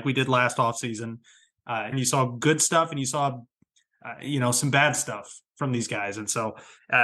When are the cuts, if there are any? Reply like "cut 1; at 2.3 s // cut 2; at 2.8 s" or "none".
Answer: cut 1; at 1.9 s